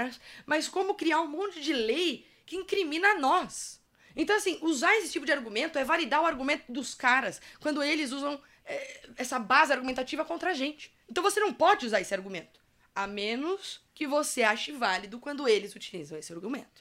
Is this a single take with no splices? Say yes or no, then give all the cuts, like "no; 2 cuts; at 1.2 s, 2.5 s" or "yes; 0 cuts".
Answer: no; 1 cut; at 13.9 s